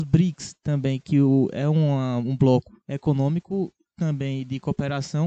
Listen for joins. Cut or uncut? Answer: cut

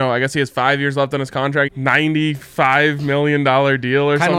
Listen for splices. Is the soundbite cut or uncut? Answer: cut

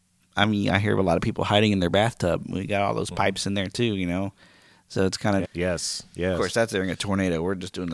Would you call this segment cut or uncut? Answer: cut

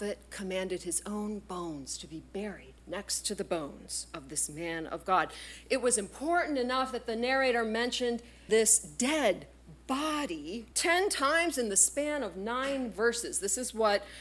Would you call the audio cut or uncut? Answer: cut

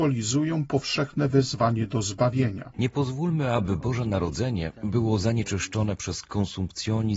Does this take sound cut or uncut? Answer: cut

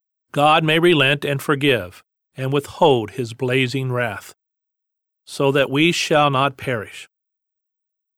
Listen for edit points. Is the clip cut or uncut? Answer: uncut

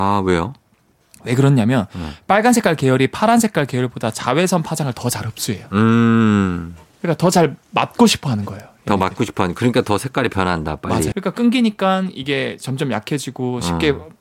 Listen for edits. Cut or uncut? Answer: cut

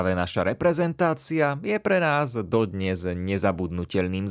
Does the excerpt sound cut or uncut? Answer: uncut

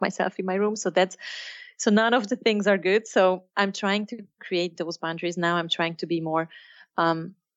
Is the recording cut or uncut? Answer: uncut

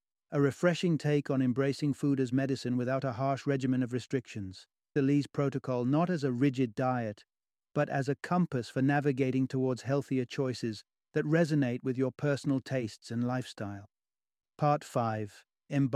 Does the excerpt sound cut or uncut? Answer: cut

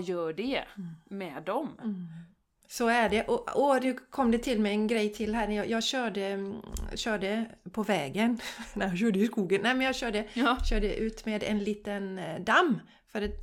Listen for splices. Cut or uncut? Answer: cut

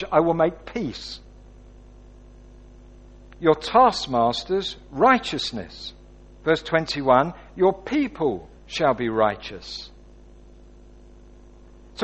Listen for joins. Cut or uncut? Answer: cut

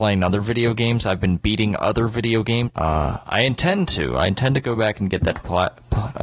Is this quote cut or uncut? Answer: cut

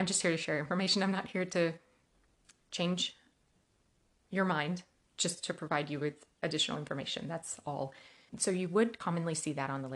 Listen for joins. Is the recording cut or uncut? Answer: cut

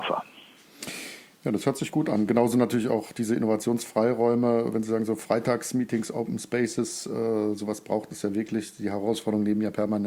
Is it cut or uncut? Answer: uncut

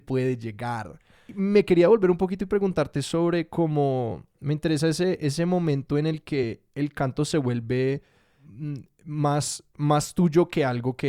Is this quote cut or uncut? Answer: uncut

